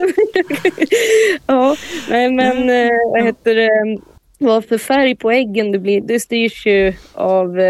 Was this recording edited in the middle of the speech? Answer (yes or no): yes